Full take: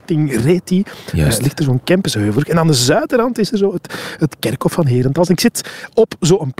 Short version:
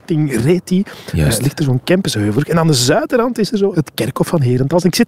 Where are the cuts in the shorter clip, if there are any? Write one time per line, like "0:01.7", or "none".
0:03.7